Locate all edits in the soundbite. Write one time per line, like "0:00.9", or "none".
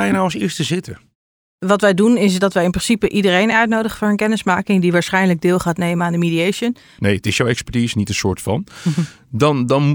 0:07.0